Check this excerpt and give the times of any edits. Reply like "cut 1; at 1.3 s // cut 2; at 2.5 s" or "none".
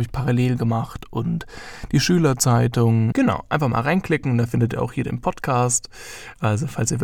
cut 1; at 3.1 s